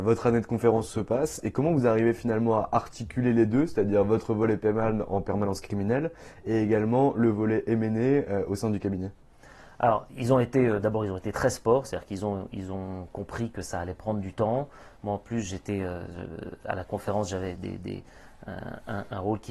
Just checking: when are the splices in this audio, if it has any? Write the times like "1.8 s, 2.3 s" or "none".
17.5 s